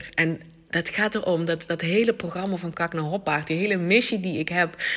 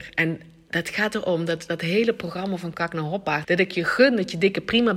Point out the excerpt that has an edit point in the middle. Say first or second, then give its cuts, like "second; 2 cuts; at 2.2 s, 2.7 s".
second; 1 cut; at 3.4 s